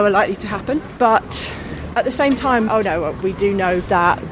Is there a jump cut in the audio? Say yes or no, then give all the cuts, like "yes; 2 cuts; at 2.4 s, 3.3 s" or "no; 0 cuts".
yes; 1 cut; at 2.7 s